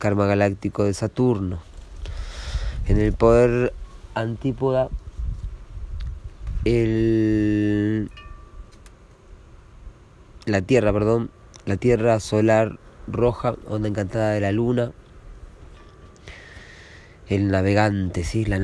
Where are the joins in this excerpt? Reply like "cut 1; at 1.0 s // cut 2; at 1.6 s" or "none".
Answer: none

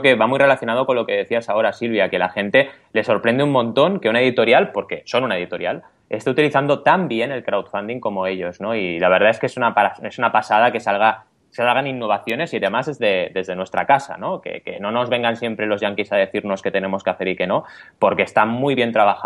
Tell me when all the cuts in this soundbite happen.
none

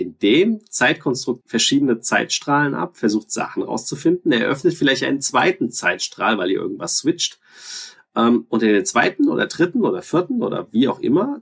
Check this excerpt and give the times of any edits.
cut 1; at 1.4 s

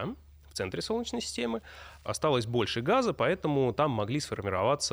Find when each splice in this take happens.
cut 1; at 2.0 s

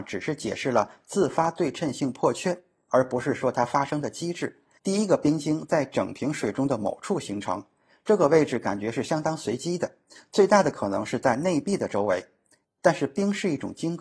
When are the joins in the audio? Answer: cut 1; at 4.8 s // cut 2; at 12.6 s

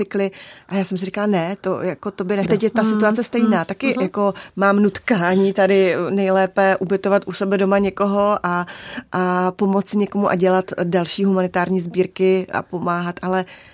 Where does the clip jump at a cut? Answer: cut 1; at 2.5 s

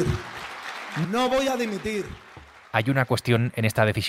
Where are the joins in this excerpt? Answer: cut 1; at 1.0 s

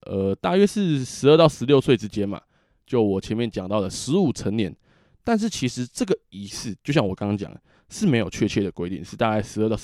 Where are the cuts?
none

